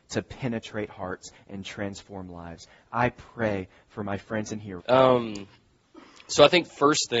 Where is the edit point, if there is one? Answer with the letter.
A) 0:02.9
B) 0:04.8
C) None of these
B